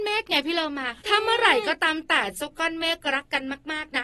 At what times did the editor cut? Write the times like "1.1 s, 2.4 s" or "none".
1.0 s